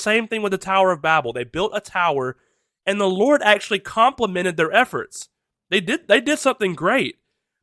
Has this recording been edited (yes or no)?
no